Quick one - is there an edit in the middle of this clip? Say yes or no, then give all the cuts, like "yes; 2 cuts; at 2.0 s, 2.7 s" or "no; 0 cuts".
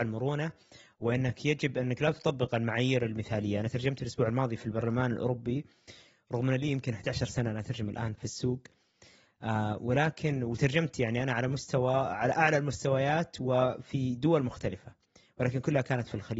yes; 1 cut; at 8.1 s